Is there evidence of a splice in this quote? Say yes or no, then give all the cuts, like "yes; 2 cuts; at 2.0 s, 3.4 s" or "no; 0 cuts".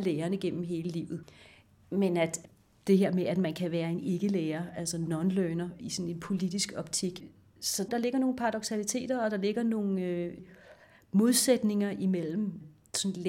no; 0 cuts